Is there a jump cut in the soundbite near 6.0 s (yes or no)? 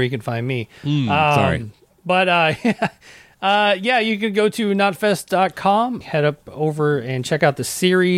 yes